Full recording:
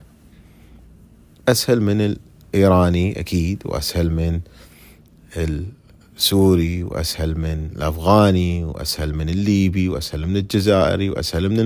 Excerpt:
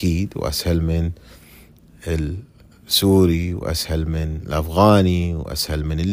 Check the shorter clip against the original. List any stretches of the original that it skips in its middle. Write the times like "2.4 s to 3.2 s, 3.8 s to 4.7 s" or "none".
none